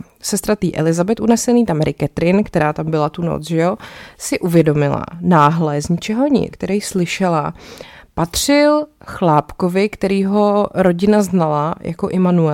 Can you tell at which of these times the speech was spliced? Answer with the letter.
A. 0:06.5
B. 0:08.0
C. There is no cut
A